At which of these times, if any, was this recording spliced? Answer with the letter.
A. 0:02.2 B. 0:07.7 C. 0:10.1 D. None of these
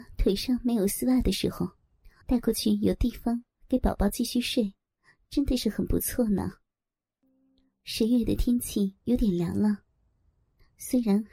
A